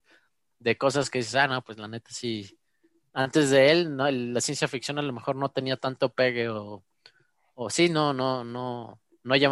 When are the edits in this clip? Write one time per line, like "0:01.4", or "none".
none